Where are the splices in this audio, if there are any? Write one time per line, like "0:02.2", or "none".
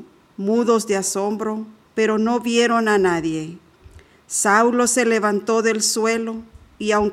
0:01.9

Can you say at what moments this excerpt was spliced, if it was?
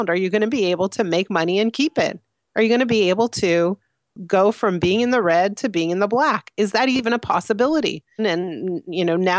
0:08.2

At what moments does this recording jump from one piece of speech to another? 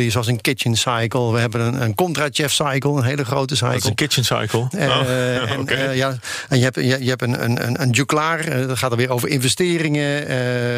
0:04.7

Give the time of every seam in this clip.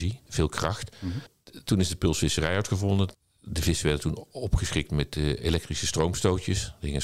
none

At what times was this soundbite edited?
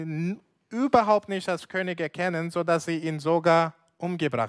none

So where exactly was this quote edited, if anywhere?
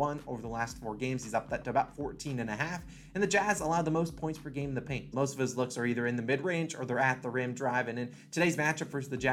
0:05.1

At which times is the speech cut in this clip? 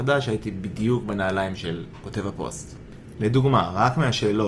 0:03.1

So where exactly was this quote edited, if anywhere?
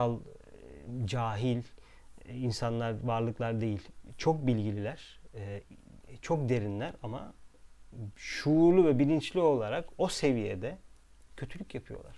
none

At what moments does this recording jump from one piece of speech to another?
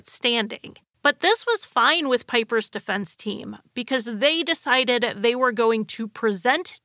0:00.9

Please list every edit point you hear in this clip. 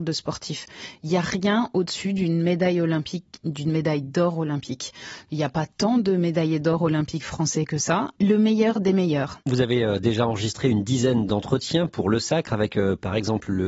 0:08.2

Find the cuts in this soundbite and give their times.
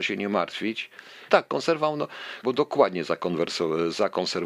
0:01.3
0:02.4

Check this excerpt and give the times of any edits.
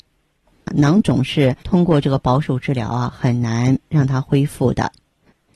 0:01.6

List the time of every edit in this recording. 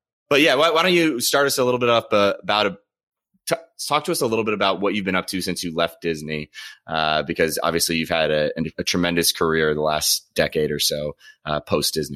none

